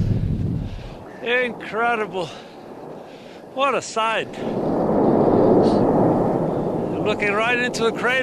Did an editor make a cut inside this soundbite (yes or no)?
no